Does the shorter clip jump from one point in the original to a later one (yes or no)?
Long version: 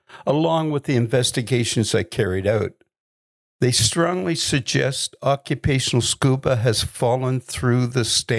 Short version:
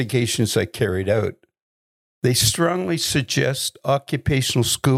no